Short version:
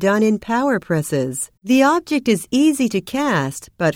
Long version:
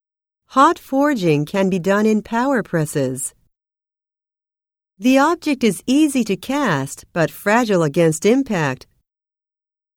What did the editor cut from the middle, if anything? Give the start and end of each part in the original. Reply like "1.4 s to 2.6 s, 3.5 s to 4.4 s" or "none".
3.4 s to 4.9 s